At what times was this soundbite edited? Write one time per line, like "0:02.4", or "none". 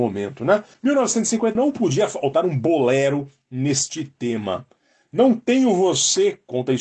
0:01.6